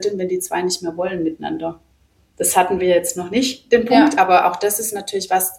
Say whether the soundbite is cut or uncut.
uncut